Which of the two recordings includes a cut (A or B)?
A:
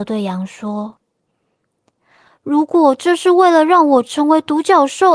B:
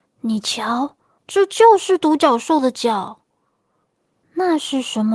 B